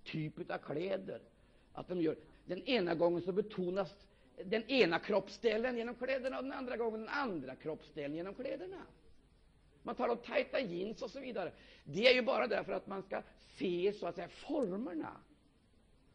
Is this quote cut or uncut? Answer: cut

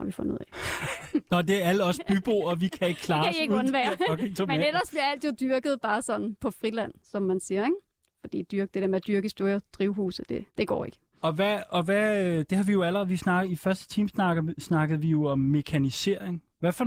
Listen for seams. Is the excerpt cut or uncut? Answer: cut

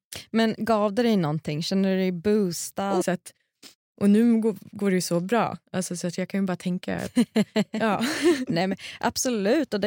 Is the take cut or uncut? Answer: cut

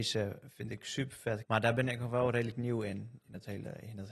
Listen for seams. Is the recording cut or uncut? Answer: cut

